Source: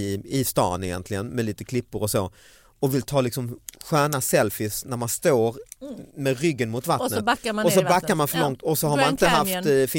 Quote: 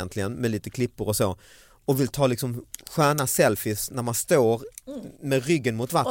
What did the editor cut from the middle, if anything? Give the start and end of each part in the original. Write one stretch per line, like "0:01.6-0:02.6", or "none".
none